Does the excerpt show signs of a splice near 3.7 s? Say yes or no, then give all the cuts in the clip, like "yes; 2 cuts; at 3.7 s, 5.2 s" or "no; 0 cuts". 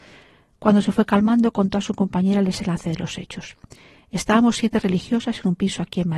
no; 0 cuts